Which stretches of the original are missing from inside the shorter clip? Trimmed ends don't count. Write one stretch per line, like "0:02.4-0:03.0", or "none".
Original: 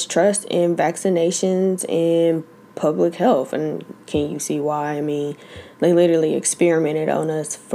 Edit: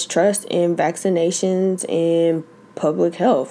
none